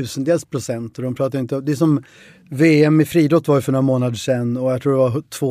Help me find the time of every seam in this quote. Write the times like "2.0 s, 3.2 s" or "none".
none